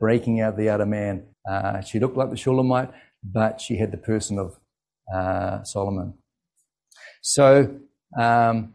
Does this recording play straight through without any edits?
no; 1 cut; at 1.3 s

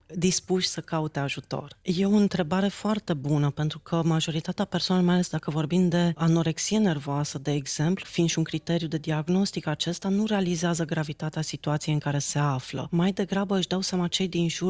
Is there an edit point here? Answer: yes; 2 cuts; at 1.8 s, 8.0 s

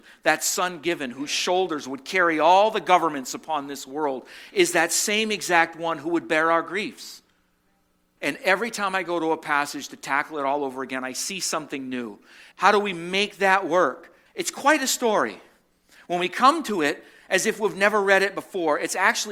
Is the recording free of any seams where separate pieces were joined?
no; 3 cuts; at 8.2 s, 12.5 s, 14.3 s

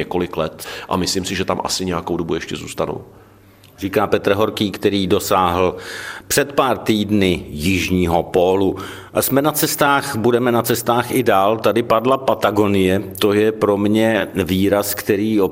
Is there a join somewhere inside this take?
no; 0 cuts

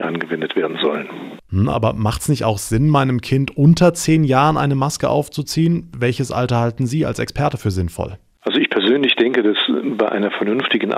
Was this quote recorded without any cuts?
yes; 0 cuts

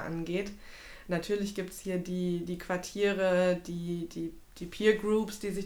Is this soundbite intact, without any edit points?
yes; 0 cuts

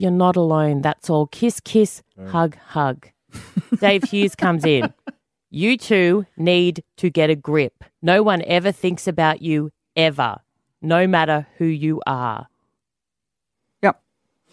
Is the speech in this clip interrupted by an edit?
yes; 1 cut; at 7.9 s

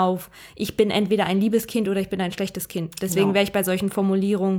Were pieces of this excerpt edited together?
no; 0 cuts

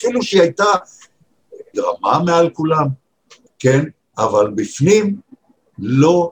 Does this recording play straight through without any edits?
no; 2 cuts; at 1.7 s, 3.5 s

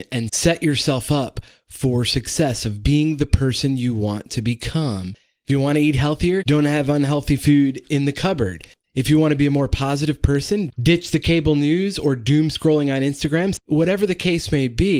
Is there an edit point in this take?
yes; 1 cut; at 13.6 s

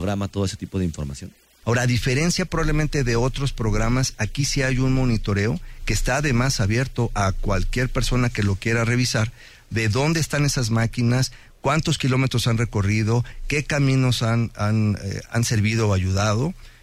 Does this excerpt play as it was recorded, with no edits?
no; 2 cuts; at 1.6 s, 15.3 s

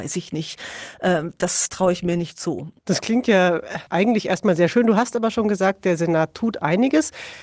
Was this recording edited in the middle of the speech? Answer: yes; 2 cuts; at 2.8 s, 3.9 s

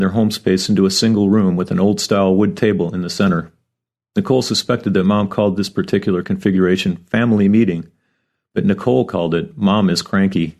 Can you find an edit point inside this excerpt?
no; 0 cuts

